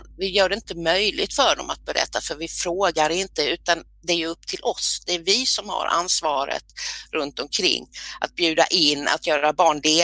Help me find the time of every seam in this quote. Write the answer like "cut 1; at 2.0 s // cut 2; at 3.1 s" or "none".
none